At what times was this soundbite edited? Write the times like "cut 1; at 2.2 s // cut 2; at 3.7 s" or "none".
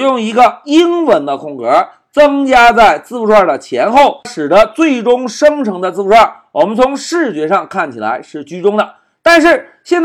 cut 1; at 4.2 s